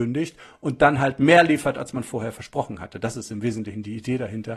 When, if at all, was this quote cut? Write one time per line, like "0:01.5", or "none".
none